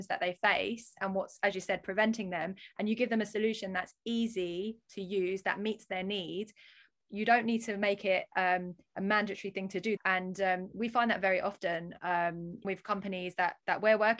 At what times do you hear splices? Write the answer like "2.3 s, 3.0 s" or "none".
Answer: 10.0 s, 12.6 s